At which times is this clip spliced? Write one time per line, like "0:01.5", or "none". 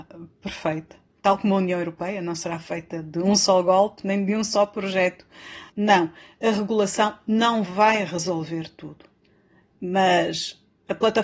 0:01.2
0:05.7